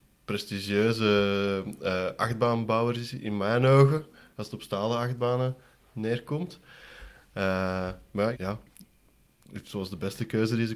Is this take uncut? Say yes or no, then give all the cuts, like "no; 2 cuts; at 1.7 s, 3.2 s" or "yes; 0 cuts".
no; 1 cut; at 8.3 s